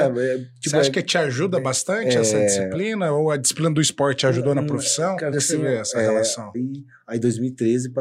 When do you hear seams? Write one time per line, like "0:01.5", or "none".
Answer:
0:05.3
0:06.5